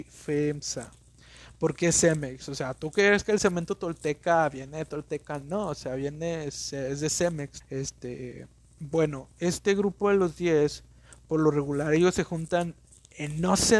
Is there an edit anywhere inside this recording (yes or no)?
yes